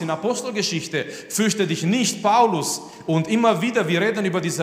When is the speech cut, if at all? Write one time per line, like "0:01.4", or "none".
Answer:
none